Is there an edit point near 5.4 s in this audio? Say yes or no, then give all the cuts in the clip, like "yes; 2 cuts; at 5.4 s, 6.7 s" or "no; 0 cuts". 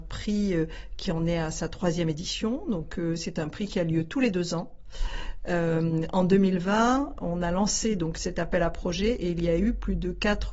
no; 0 cuts